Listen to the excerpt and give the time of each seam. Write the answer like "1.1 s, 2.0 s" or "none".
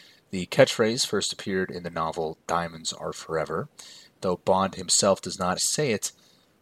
5.6 s